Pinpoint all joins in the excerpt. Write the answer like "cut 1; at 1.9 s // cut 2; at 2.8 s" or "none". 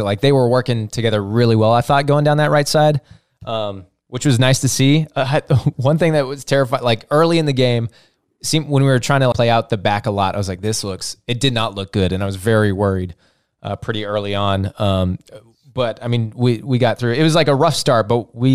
cut 1; at 9.3 s